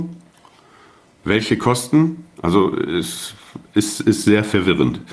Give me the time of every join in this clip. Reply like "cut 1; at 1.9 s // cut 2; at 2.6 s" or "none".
none